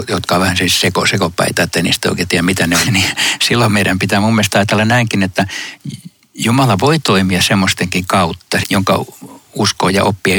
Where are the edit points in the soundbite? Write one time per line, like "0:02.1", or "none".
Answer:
0:02.9
0:08.6